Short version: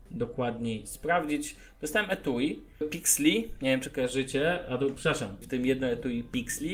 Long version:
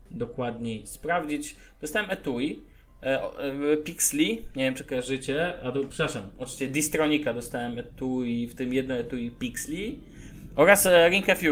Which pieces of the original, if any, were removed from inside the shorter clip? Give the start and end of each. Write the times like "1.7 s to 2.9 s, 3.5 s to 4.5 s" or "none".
2.8 s to 3.7 s, 6.4 s to 8.5 s